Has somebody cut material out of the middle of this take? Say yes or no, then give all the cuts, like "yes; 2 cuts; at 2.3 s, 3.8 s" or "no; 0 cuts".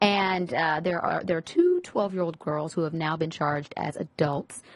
no; 0 cuts